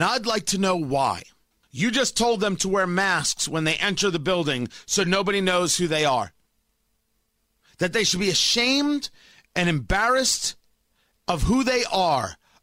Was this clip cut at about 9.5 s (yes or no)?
no